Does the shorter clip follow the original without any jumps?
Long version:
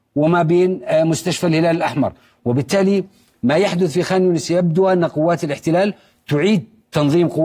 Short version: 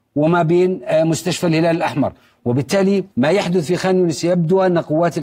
no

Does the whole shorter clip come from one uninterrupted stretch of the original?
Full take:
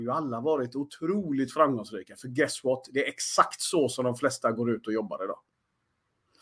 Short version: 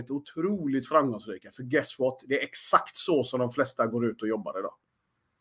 yes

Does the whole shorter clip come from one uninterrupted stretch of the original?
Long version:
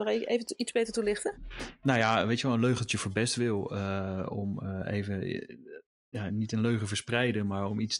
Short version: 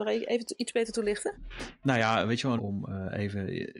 no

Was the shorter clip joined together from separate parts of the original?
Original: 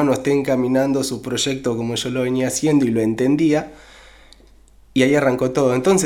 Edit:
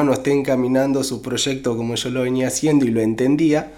no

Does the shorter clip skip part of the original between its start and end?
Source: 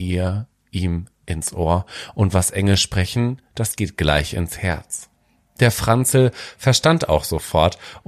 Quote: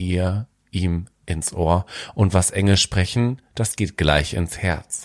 no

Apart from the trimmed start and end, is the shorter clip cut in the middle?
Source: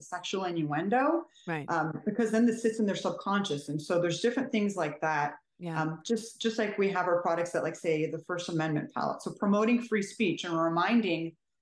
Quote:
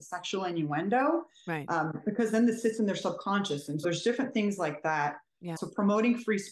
yes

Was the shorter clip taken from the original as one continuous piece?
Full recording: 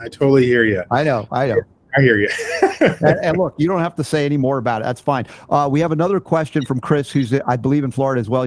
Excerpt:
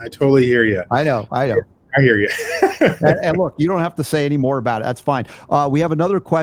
yes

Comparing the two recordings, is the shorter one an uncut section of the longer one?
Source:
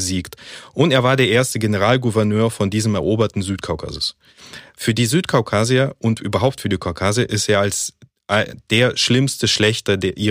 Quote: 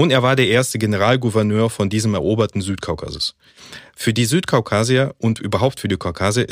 yes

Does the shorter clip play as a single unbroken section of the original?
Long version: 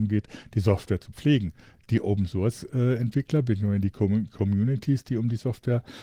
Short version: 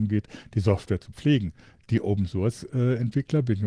yes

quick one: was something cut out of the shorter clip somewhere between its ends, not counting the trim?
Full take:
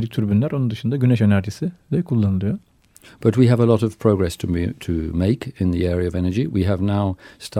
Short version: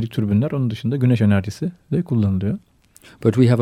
no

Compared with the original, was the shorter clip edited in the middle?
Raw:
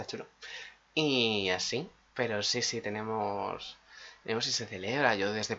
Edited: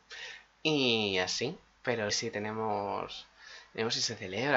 yes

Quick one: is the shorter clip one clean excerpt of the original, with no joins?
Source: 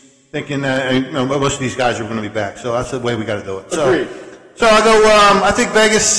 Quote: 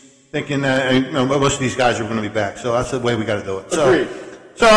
yes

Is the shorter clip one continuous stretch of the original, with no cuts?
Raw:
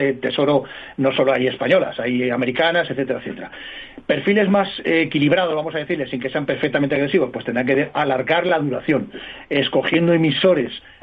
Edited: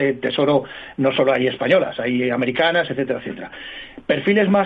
yes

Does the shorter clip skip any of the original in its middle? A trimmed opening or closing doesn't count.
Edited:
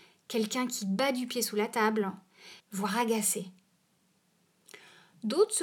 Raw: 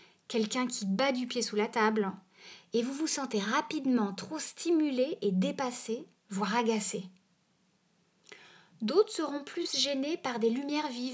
yes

